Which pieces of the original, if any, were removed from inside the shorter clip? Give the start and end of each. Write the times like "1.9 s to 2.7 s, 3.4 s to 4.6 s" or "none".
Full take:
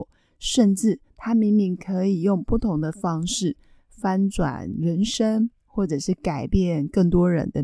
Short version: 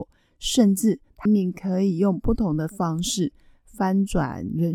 1.3 s to 1.5 s